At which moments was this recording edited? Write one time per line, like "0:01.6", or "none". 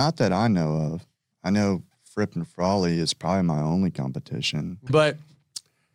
0:04.9

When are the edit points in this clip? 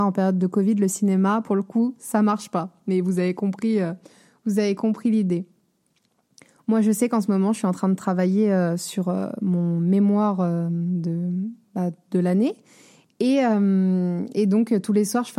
none

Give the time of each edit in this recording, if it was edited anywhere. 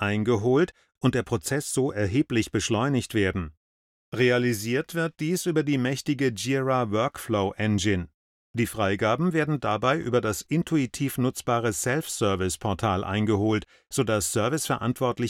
none

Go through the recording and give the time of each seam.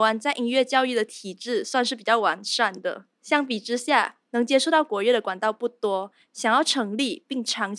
0:03.1
0:04.2

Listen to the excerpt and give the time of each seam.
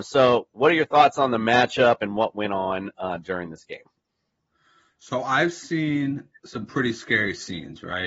none

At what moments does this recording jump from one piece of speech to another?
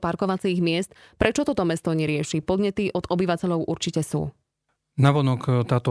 none

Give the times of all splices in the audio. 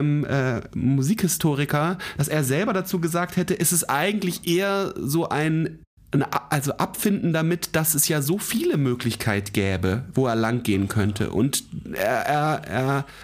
none

